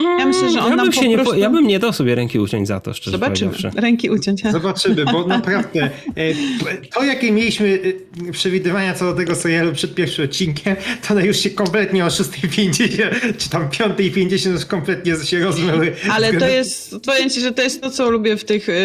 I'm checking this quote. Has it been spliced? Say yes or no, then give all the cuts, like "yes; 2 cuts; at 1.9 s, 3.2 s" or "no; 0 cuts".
no; 0 cuts